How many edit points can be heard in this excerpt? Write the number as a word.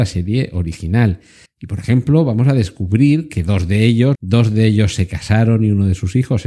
two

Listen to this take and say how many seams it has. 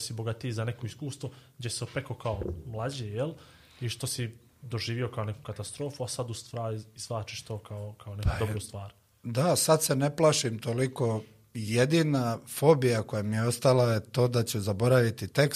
zero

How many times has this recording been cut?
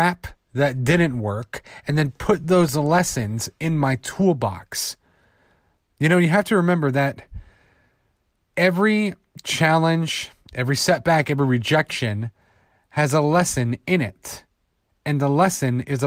zero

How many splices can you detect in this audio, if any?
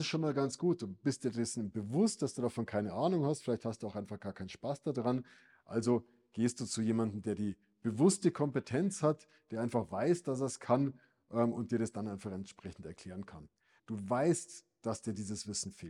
one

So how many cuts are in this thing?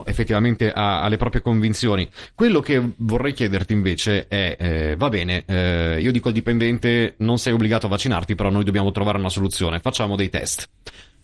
zero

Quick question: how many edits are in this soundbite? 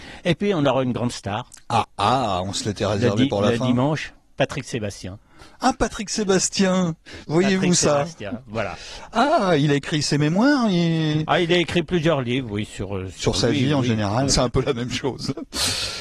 two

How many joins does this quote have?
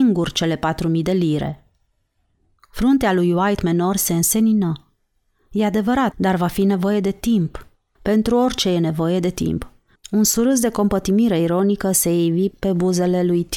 three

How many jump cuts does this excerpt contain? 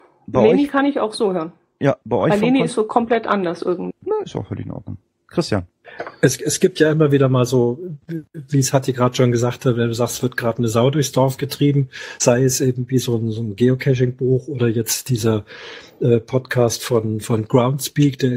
one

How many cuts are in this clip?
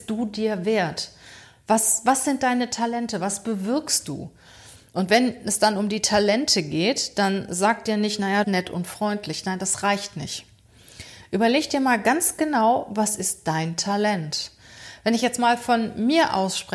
one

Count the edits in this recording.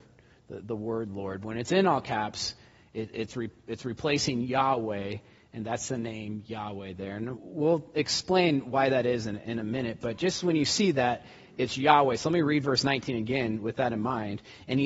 one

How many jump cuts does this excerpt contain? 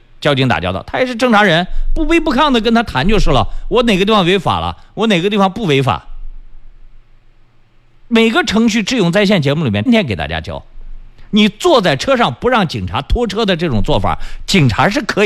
one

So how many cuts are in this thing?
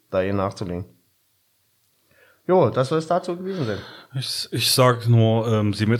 zero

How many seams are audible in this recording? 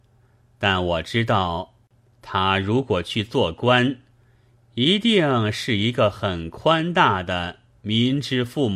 zero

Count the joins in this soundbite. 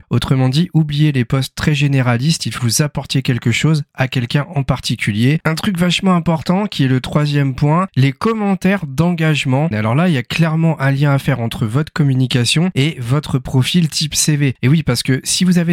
three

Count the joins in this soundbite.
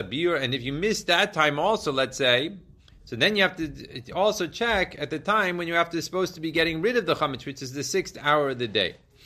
zero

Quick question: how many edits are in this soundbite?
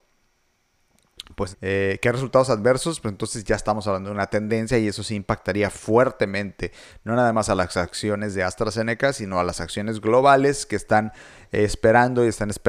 one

